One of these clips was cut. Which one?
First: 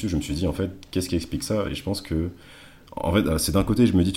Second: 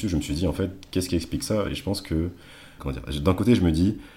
second; 1 cut; at 2.8 s

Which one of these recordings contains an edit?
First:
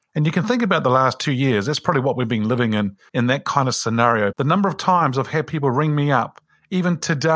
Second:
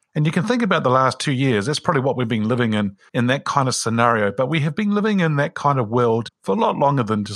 first; 1 cut; at 4.3 s

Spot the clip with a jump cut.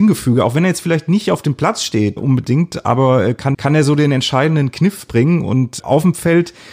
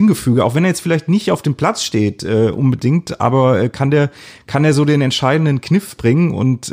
first; 3 cuts; at 2.2 s, 3.5 s, 5.8 s

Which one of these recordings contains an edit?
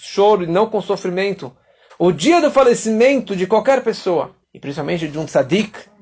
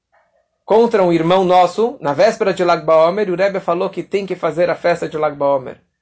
first; 2 cuts; at 1.9 s, 4.4 s

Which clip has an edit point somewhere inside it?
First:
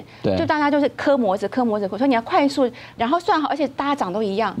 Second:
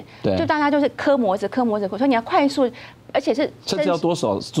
first; 1 cut; at 3.0 s

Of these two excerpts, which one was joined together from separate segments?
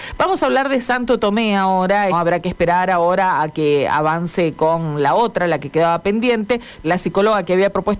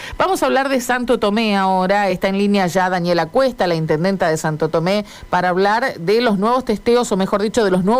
first; 2 cuts; at 2.1 s, 6.8 s

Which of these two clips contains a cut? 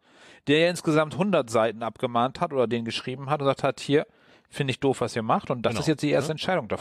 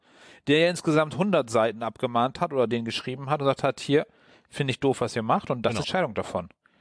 second; 1 cut; at 5.8 s

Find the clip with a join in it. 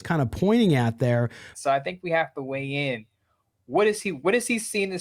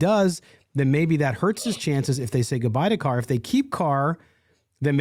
first; 1 cut; at 1.5 s

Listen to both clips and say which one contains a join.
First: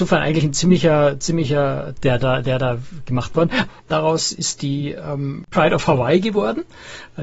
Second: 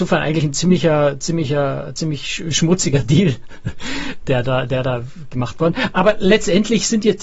first; 2 cuts; at 2.0 s, 3.7 s

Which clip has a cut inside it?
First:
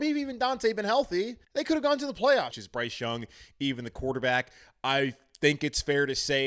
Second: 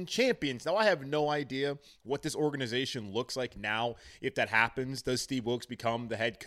first; 2 cuts; at 1.4 s, 2.5 s

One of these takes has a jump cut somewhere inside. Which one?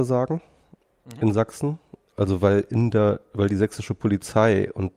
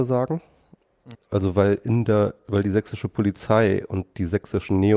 second; 1 cut; at 1.1 s

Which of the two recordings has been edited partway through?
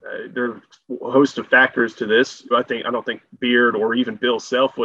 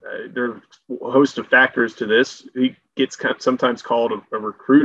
first; 1 cut; at 2.5 s

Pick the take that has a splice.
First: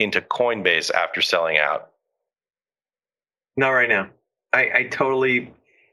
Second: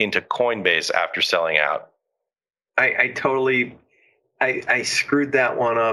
second; 1 cut; at 2.7 s

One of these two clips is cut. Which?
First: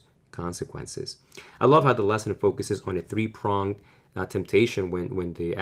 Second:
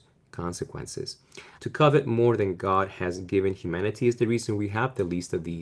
second; 1 cut; at 1.6 s

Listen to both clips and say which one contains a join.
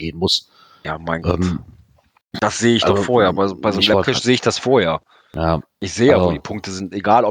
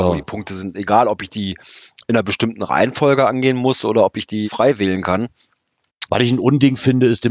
second; 2 cuts; at 4.4 s, 6.1 s

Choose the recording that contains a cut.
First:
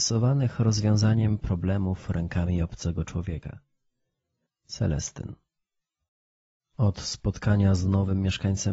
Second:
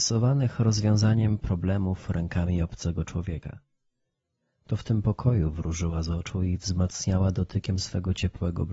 first; 1 cut; at 4.5 s

